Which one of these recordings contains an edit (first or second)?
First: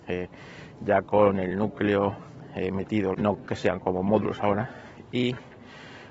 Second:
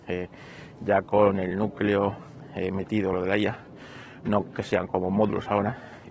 first